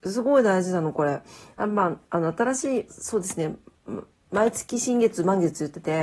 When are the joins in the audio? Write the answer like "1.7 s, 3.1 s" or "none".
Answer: 2.9 s